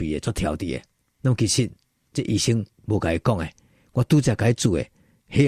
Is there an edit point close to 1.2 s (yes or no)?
yes